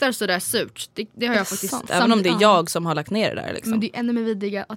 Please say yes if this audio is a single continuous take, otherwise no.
no